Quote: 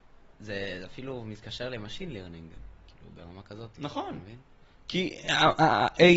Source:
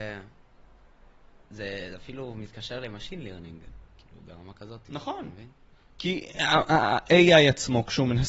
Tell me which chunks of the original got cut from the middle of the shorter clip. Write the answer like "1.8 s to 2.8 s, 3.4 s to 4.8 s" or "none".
none

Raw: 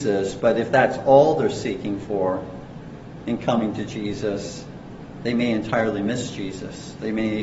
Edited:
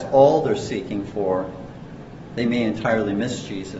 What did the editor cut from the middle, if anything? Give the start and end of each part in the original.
3.2 s to 5.2 s

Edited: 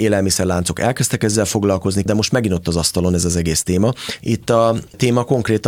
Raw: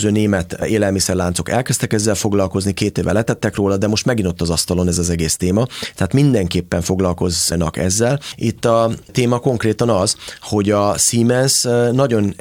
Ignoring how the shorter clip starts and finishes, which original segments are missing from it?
2.8 s to 3.8 s, 5.9 s to 8.4 s

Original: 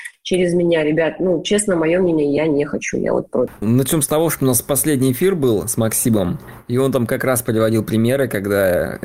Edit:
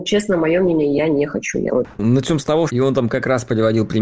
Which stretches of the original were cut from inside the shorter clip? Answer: 3.1 s to 3.3 s, 4.3 s to 6.6 s

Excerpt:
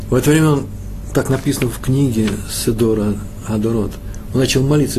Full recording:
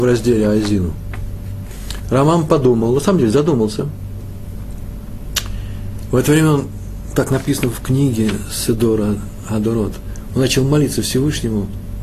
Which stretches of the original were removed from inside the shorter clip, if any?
none

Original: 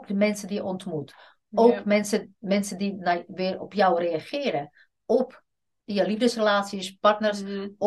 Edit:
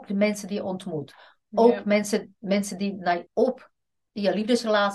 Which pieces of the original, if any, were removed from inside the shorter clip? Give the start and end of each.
3.3 s to 5.0 s

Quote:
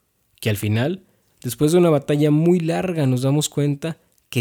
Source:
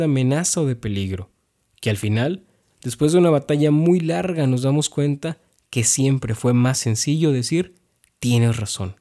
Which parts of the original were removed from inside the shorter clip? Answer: none

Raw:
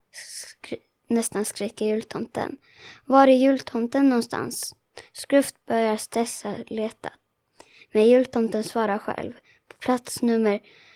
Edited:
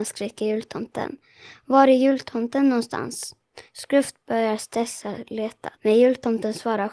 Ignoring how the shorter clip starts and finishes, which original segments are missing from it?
7.2 s to 7.9 s

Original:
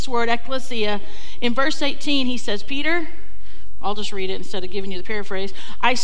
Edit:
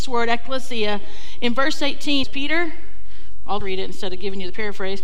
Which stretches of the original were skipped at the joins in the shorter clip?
2.2 s to 2.6 s, 4.0 s to 4.1 s

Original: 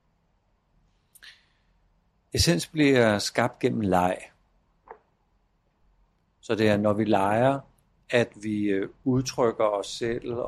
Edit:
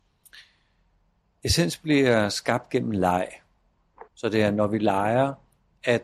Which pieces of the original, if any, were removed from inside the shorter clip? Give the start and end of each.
5.0 s to 6.3 s

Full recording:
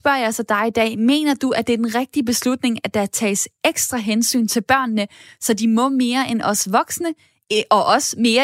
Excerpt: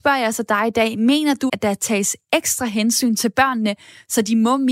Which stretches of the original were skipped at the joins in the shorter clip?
1.5 s to 2.8 s

